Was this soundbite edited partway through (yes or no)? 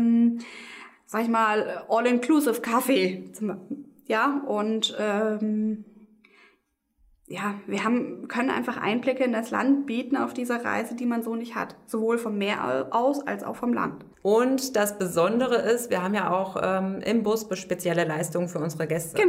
yes